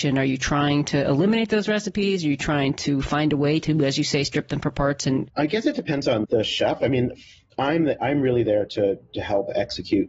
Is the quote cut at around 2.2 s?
no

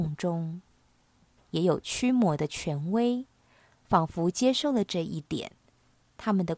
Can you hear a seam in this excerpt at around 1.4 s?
yes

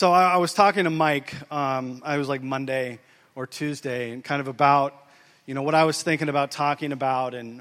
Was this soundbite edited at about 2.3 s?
no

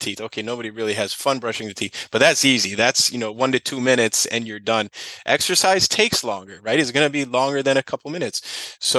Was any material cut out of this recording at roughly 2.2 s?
no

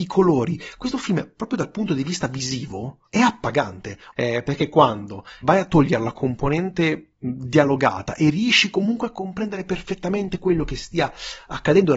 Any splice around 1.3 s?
no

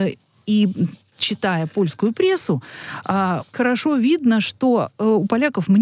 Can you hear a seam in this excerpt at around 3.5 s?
yes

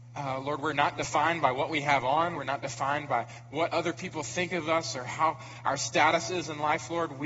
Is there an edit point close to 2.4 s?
yes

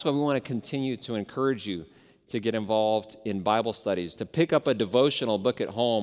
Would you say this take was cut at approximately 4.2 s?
yes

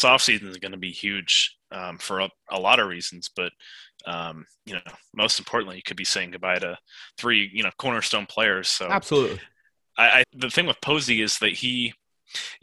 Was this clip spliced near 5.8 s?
no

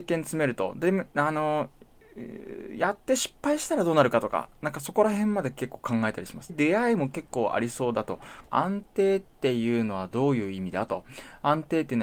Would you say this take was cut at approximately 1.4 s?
no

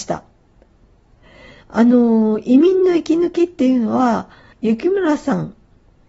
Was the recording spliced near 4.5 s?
yes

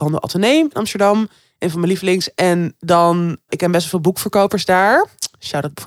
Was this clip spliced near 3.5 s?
yes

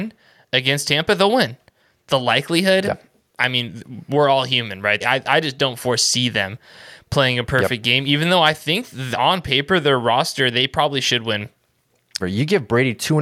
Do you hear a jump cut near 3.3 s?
no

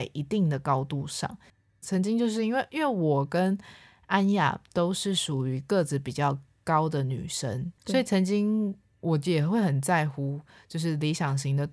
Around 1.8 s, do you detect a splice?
yes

